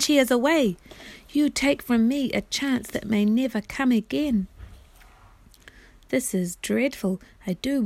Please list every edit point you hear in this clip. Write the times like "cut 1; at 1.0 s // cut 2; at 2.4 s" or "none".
none